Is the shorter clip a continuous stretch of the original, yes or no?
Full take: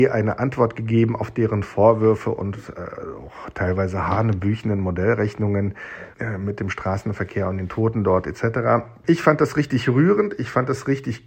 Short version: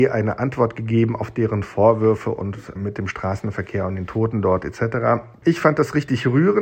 no